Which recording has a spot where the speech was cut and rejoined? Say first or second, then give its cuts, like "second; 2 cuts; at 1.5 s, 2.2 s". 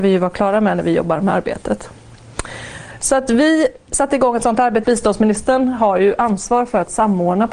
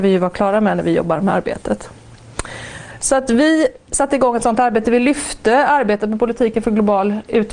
first; 1 cut; at 4.8 s